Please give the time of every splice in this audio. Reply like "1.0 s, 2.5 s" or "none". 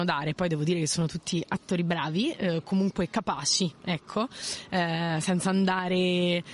none

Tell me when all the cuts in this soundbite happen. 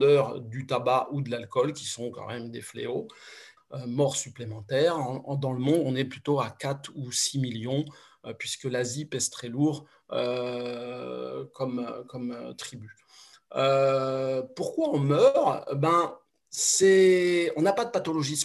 3.6 s

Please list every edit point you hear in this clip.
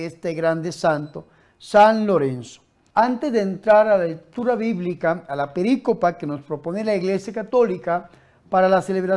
2.9 s

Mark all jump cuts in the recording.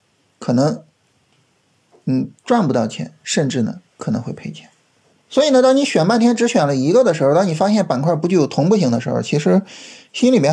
none

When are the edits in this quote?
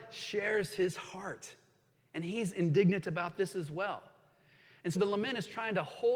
4.9 s

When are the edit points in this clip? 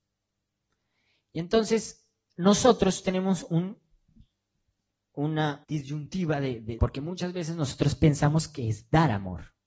5.6 s, 6.8 s

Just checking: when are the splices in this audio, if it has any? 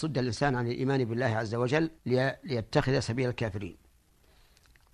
2.0 s

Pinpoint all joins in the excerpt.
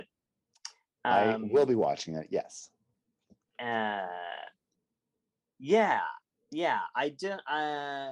none

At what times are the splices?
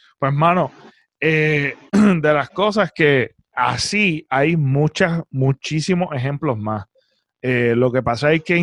3.5 s

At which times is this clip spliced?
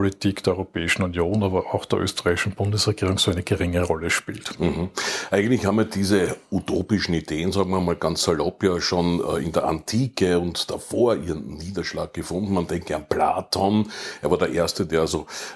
none

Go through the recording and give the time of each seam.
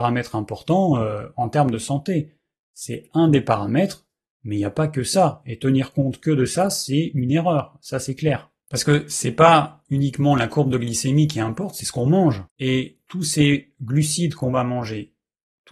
none

